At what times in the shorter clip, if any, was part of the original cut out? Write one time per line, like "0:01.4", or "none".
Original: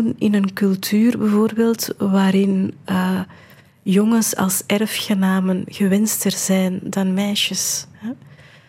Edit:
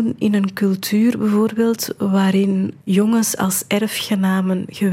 0:02.8